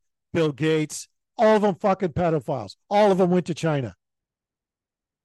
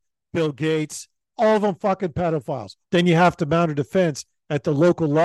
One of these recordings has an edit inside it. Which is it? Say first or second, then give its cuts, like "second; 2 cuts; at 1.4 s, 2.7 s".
second; 1 cut; at 2.8 s